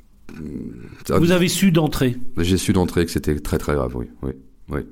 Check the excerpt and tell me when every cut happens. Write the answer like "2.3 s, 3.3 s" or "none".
none